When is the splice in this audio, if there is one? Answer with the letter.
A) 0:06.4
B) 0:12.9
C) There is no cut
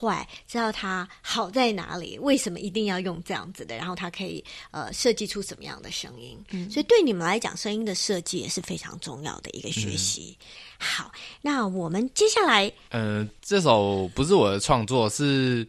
B